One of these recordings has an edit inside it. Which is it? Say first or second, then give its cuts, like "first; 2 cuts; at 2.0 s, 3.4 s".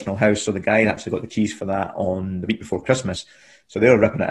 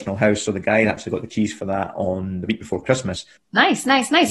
second; 1 cut; at 3.4 s